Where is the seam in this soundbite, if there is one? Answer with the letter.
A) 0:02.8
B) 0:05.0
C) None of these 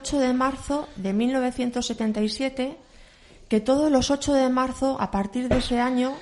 C